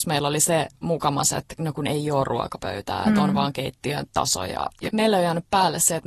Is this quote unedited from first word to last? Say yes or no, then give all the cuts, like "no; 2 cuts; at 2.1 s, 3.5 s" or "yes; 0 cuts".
no; 1 cut; at 4.9 s